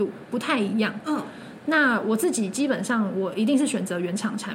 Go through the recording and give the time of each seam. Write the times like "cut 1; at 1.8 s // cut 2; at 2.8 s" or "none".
none